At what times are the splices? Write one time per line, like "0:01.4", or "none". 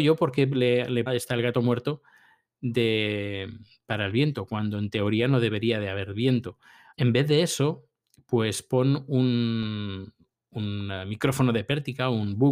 0:01.1
0:06.9